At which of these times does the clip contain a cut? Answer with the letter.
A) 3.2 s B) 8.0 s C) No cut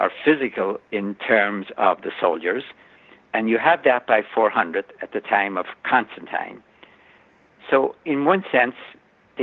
C